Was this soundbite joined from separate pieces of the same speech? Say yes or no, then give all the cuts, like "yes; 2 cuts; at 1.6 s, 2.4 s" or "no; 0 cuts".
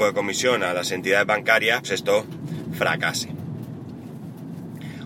yes; 1 cut; at 1.8 s